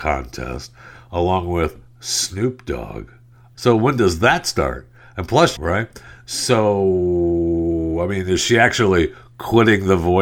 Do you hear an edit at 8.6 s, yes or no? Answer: no